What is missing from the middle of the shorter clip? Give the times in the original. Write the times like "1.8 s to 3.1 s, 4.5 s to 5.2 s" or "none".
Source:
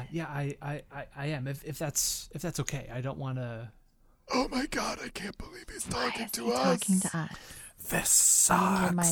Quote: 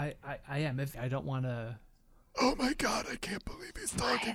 1.6 s to 2.9 s